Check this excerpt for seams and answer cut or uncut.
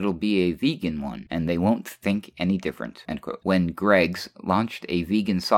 cut